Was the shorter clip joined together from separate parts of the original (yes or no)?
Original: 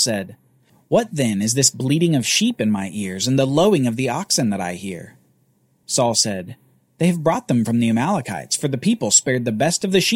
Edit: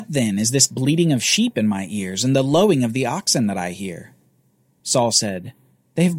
no